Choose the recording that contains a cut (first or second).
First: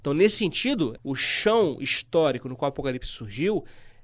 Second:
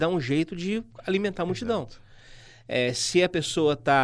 first